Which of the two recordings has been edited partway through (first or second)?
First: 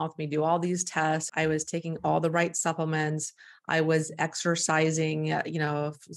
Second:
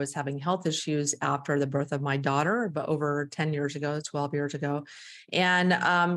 first